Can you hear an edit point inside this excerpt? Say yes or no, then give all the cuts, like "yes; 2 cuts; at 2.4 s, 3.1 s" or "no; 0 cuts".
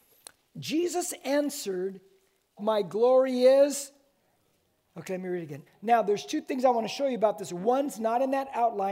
yes; 2 cuts; at 2.6 s, 5.7 s